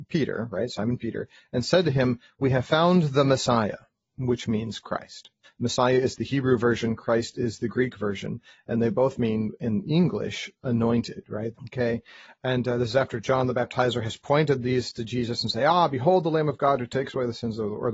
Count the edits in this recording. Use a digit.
2